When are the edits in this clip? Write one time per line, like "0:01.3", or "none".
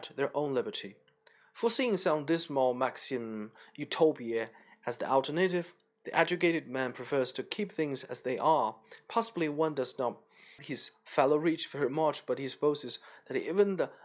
0:10.6